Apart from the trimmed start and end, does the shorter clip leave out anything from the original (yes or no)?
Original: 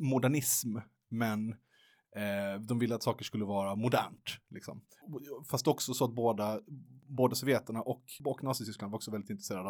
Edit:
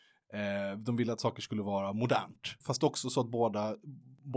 yes